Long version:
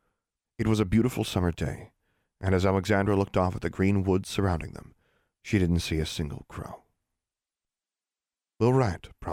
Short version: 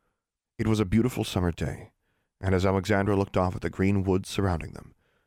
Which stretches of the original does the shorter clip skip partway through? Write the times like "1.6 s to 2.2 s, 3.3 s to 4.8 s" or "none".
none